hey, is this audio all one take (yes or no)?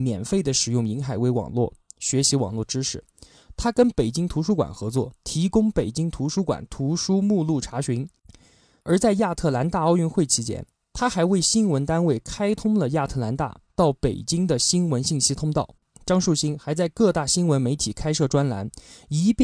no